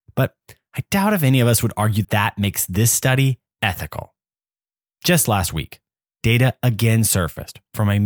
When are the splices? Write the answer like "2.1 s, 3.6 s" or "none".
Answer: 2.0 s, 5.0 s